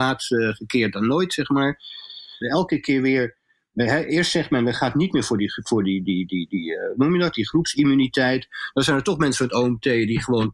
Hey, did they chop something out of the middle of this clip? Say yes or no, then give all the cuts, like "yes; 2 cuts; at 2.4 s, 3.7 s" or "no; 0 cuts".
yes; 1 cut; at 2.4 s